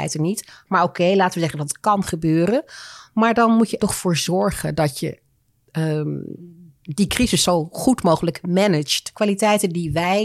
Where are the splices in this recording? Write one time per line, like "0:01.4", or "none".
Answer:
0:03.8
0:09.1

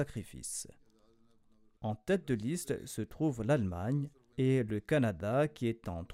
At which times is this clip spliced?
0:01.8
0:04.3

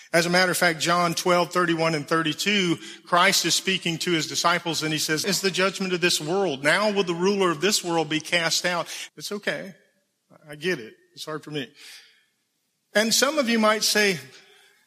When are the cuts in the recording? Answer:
0:05.2
0:09.1

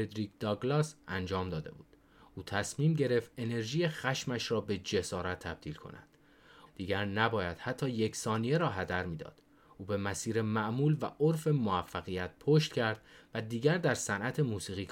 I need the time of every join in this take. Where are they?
0:06.7

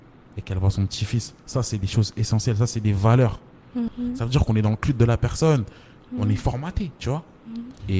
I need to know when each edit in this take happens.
0:03.9
0:06.0

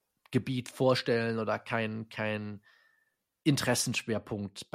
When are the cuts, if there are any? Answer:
none

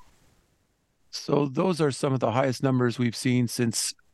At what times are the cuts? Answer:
0:01.0

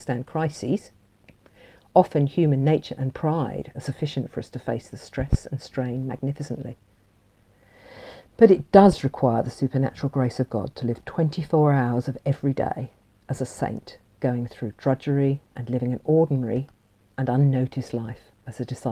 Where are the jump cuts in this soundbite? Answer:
none

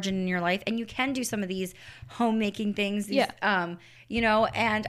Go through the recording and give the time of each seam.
0:04.0

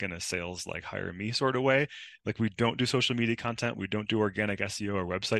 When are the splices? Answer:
0:02.2

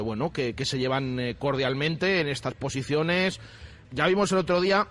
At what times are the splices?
0:03.8

